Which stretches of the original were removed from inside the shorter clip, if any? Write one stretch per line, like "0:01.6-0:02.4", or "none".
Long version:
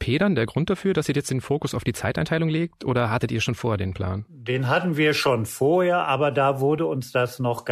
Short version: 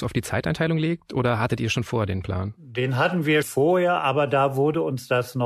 0:05.1-0:05.5